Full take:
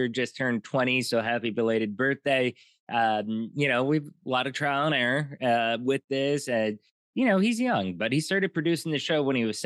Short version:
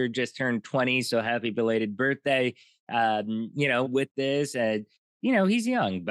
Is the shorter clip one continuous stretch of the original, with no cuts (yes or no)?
no